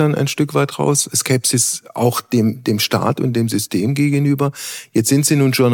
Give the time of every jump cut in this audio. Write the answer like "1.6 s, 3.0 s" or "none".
1.1 s

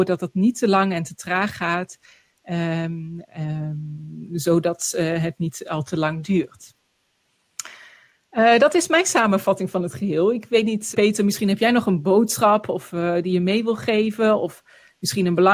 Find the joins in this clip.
10.9 s

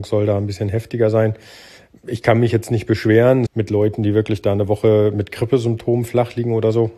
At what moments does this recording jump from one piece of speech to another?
3.5 s

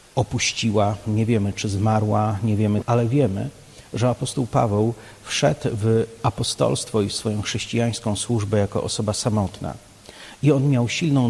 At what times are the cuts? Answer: 2.8 s

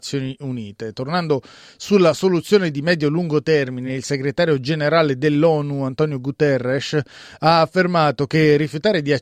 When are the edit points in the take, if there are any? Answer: none

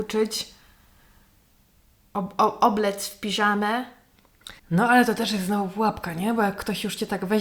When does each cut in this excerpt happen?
4.6 s

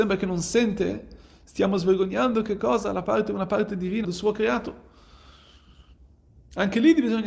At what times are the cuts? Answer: 4.0 s

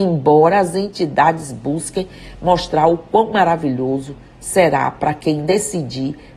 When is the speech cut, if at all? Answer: none

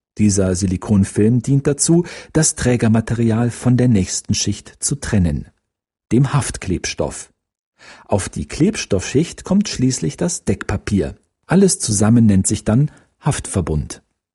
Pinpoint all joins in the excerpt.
none

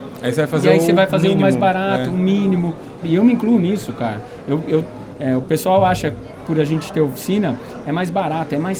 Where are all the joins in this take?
3.0 s

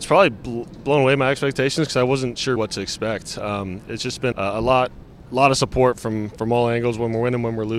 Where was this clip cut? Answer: 2.6 s, 4.3 s

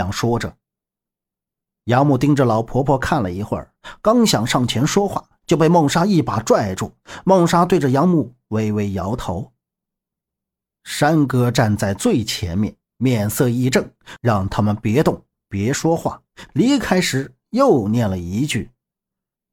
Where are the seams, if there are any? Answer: 14.2 s, 16.5 s

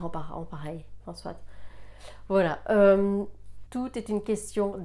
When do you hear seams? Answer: 1.0 s, 3.7 s

